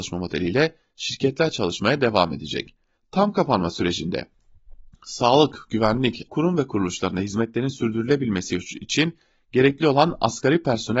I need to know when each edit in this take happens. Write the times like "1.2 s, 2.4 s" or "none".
3.0 s, 6.3 s